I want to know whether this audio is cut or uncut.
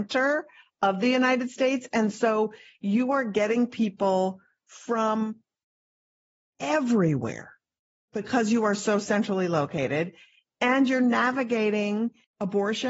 uncut